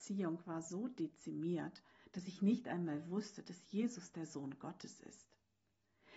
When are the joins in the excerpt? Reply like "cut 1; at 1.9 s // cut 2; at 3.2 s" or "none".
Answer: none